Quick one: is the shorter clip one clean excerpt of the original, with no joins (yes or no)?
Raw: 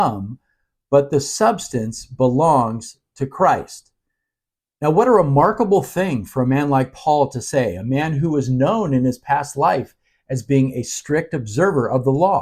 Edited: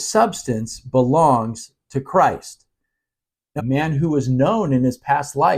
no